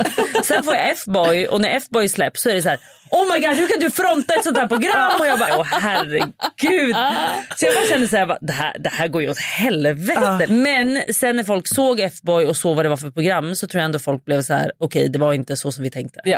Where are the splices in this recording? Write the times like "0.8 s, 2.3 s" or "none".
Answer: 5.5 s, 10.5 s